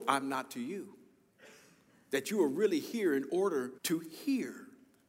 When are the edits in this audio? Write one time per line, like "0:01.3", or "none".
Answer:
0:03.8